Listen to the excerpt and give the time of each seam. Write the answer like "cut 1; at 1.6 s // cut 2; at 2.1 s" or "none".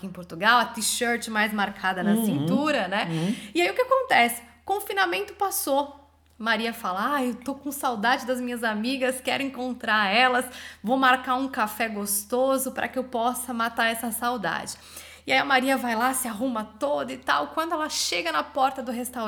none